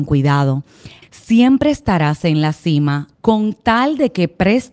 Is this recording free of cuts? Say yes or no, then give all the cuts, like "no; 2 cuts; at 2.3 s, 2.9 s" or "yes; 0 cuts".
no; 2 cuts; at 1.0 s, 3.1 s